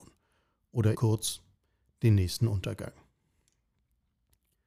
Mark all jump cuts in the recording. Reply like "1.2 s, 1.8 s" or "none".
0.9 s